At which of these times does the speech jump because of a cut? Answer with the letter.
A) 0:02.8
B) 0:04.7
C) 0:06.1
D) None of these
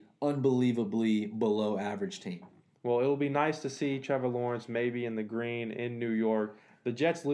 D